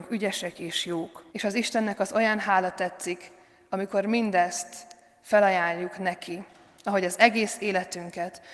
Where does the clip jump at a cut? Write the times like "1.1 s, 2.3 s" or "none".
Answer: 1.3 s